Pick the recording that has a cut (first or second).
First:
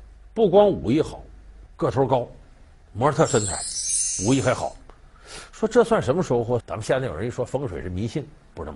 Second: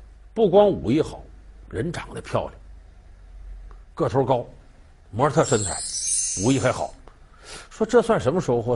first